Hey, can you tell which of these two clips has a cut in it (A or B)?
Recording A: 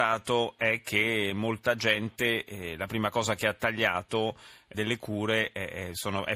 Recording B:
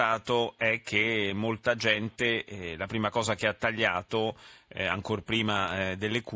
A